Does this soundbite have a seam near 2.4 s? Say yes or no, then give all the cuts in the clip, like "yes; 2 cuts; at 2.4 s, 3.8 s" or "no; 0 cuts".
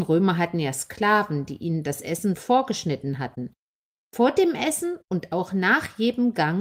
yes; 1 cut; at 2.4 s